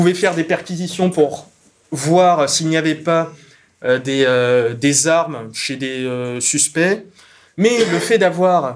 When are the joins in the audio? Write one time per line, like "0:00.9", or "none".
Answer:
0:07.5